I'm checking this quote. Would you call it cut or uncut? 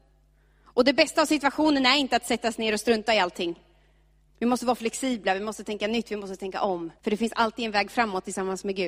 cut